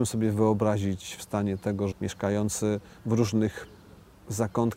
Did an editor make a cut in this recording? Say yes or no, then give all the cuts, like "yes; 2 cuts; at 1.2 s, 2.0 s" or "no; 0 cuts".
yes; 1 cut; at 1.9 s